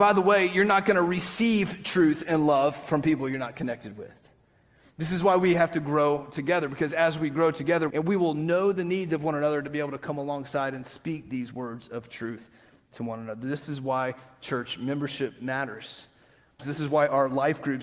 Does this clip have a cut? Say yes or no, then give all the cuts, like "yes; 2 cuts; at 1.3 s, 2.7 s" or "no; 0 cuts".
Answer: yes; 2 cuts; at 7.9 s, 16.6 s